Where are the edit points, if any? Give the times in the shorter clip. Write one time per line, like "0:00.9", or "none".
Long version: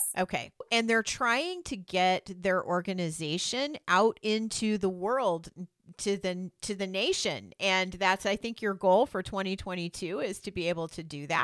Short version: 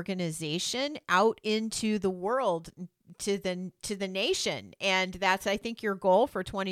none